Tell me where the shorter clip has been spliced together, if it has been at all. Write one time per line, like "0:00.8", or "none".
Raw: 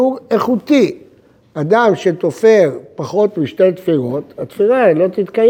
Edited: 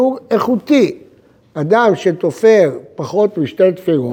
none